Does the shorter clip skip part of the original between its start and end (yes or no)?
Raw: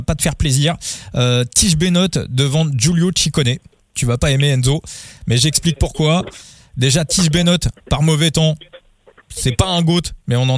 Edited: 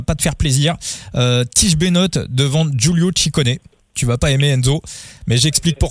no